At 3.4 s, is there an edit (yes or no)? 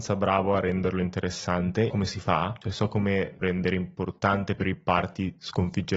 yes